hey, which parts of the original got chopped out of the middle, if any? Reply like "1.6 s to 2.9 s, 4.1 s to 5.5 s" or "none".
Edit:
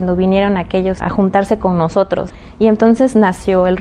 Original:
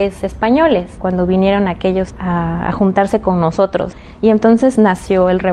2.1 s to 2.6 s